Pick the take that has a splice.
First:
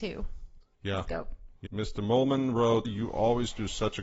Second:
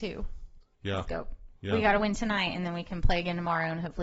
first; 2 cuts; at 1.7 s, 2.8 s

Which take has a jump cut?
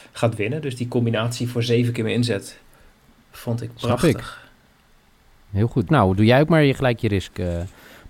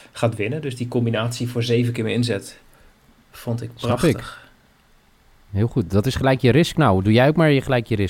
first; 1 cut; at 5.9 s

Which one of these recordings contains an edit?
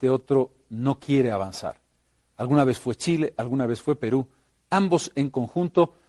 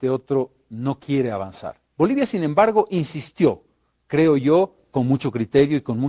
second; 1 cut; at 1.9 s

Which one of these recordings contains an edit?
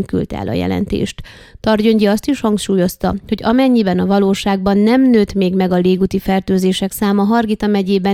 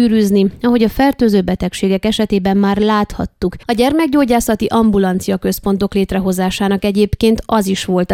second; 1 cut; at 3.6 s

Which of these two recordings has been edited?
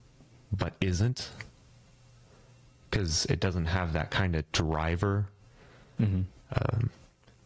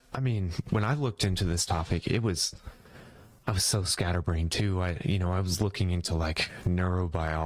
first; 1 cut; at 6.0 s

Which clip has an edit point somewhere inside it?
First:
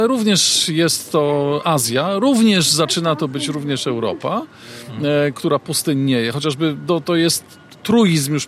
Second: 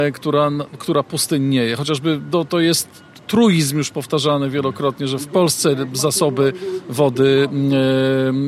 first; 1 cut; at 5.3 s

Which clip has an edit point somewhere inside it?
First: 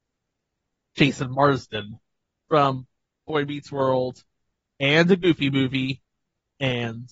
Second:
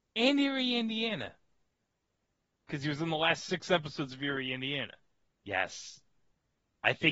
second; 1 cut; at 5.3 s

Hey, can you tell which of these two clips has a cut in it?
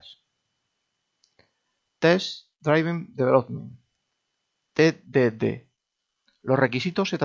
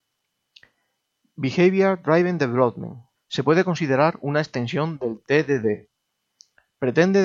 second; 1 cut; at 3.2 s

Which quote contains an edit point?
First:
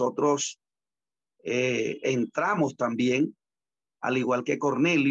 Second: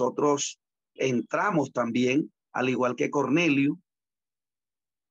second; 2 cuts; at 1.0 s, 2.4 s

